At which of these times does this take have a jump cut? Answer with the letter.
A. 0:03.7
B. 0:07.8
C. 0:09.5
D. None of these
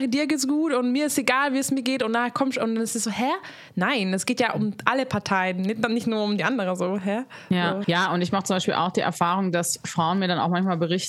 B